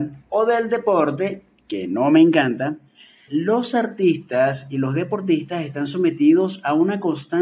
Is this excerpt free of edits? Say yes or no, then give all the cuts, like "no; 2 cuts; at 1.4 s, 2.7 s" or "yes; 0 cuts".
no; 1 cut; at 3.3 s